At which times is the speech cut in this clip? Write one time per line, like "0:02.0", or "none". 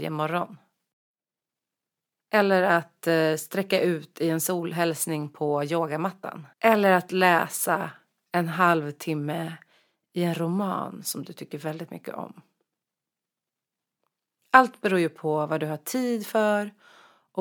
0:06.5